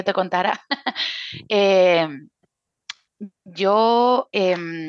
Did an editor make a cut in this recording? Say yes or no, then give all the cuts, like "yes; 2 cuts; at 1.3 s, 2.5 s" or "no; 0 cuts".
no; 0 cuts